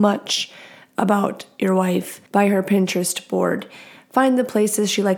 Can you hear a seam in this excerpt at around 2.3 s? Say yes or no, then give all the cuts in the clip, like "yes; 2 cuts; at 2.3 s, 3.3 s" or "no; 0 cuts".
yes; 1 cut; at 2.3 s